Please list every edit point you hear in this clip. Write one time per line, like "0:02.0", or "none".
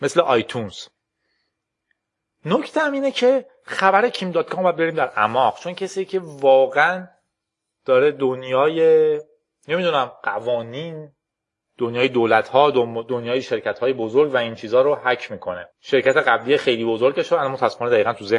0:15.7